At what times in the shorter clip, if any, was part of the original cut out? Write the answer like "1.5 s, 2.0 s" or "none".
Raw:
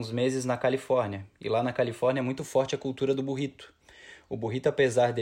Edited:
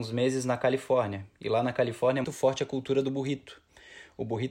2.2 s